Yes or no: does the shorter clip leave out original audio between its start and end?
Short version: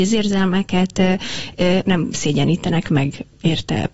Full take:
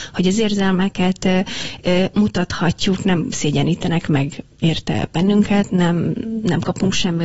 yes